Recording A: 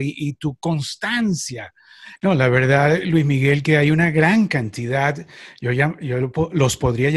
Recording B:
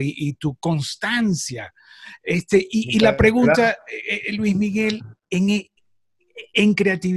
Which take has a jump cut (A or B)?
A